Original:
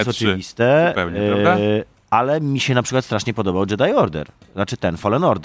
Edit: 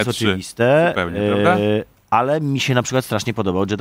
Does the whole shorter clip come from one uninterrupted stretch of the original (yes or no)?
yes